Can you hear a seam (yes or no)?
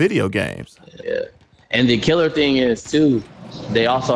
yes